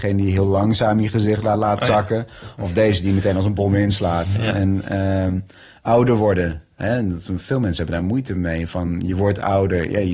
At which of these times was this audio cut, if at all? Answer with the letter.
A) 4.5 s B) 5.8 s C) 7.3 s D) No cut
D